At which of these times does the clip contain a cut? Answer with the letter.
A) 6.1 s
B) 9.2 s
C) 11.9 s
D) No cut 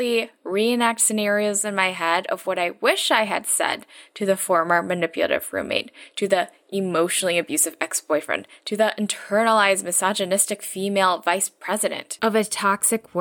D